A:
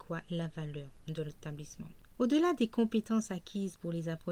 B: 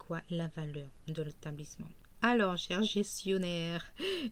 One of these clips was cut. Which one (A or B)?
A